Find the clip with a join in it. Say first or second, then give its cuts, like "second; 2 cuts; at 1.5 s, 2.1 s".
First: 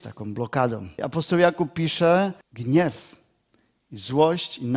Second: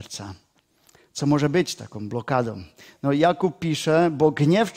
first; 2 cuts; at 1.0 s, 2.4 s